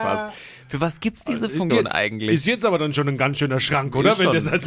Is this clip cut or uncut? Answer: cut